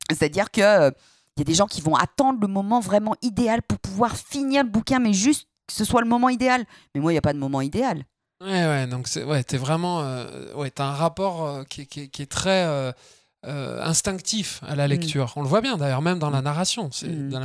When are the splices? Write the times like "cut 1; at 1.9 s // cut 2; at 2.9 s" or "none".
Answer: none